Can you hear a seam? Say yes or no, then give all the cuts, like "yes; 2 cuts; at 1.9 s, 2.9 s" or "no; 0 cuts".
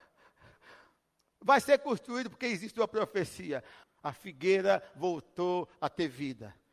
yes; 1 cut; at 3.8 s